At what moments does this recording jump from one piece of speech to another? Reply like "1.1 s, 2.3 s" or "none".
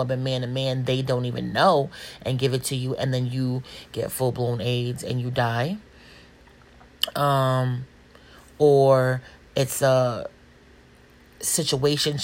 none